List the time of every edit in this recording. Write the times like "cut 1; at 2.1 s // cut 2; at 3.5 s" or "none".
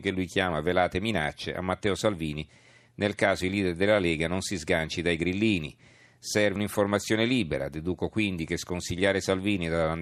cut 1; at 6.6 s